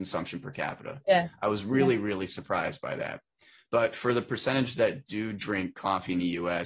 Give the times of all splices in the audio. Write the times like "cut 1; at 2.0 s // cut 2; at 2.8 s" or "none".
none